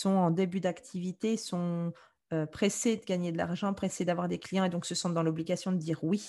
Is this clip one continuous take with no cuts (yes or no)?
yes